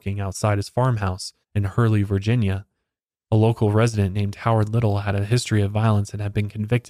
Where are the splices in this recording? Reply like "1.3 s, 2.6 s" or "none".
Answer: 1.4 s, 3.2 s